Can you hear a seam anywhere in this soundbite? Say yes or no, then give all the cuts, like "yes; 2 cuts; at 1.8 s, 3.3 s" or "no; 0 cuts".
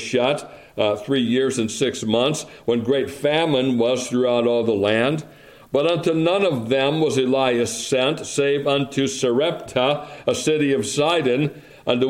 no; 0 cuts